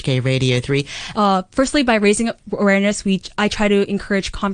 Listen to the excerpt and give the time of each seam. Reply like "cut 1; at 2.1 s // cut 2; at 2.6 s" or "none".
cut 1; at 1.1 s